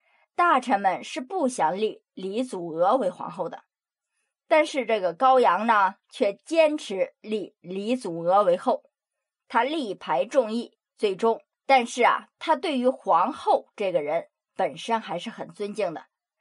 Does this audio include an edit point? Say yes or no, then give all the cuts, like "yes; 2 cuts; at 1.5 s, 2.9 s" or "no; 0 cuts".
yes; 1 cut; at 11.5 s